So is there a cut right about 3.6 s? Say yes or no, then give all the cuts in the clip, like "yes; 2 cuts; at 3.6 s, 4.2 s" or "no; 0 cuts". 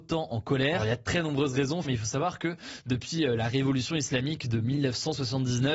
no; 1 cut; at 1.8 s